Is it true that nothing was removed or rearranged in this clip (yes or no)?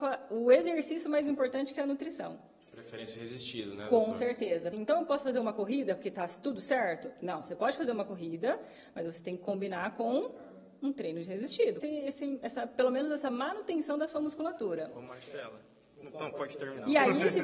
no